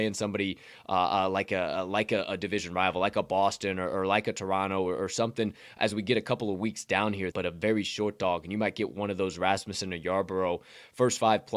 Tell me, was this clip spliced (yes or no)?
yes